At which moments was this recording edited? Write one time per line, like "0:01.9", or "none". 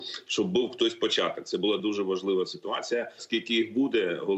0:01.8
0:03.2

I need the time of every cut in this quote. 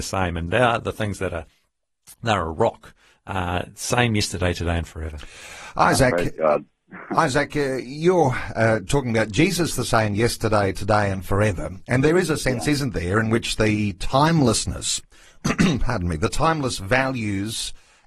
0:03.2

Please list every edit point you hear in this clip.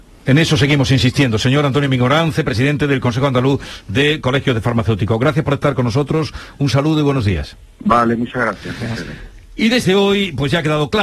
0:07.7

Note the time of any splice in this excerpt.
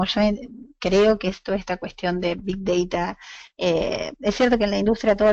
0:03.5

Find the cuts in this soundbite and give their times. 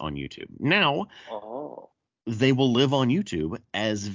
none

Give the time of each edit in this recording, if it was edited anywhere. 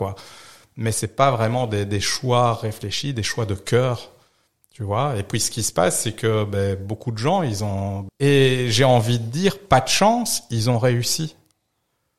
0:08.1

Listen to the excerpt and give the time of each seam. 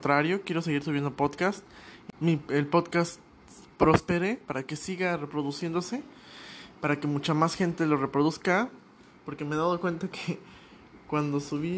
0:02.1

